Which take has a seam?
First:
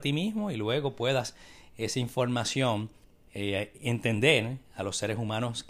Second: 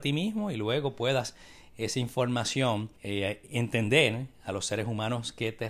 second; 1 cut; at 3.0 s

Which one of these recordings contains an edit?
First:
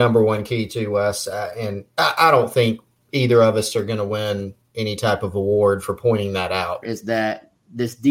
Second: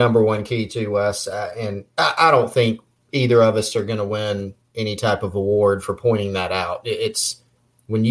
first; 1 cut; at 6.8 s

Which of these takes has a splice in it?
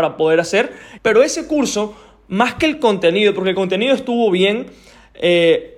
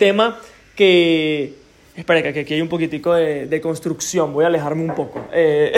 first; 1 cut; at 1.0 s

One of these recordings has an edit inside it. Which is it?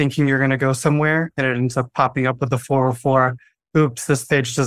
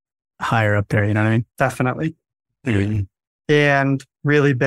second; 2 cuts; at 1.5 s, 3.3 s

